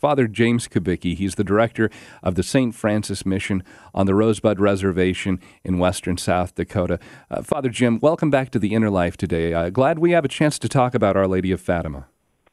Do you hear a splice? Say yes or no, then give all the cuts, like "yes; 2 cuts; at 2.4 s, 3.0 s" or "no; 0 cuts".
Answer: no; 0 cuts